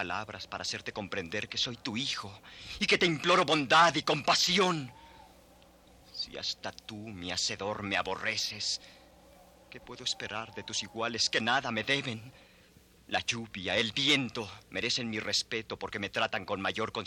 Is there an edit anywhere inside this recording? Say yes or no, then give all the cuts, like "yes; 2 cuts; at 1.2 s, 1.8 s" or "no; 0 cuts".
yes; 2 cuts; at 13.0 s, 14.6 s